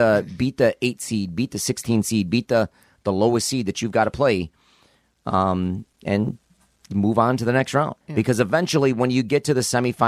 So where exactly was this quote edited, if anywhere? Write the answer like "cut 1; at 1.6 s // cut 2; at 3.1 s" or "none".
cut 1; at 8.0 s